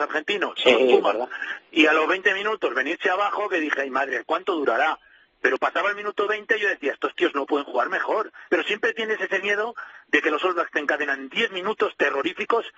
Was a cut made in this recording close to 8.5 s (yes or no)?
yes